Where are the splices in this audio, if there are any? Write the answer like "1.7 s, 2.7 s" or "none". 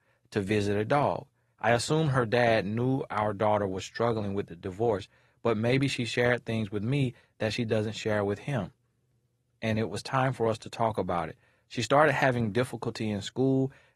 1.5 s